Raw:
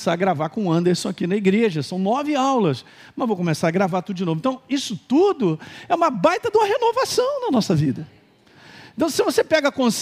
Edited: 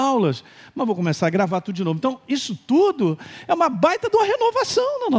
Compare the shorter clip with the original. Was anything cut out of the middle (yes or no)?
no